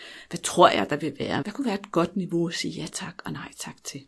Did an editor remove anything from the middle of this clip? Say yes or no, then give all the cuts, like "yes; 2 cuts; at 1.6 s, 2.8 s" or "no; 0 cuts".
yes; 1 cut; at 1.4 s